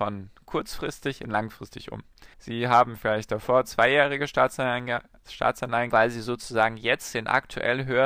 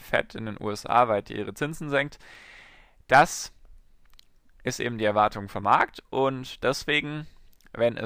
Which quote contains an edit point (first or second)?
first